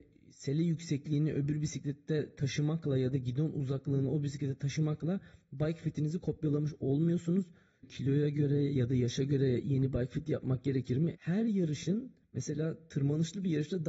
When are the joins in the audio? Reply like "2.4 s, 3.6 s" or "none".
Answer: 7.8 s, 11.2 s